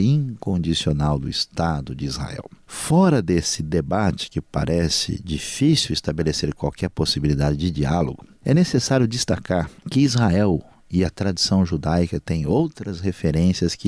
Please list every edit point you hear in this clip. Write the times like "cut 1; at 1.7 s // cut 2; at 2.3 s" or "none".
cut 1; at 9.8 s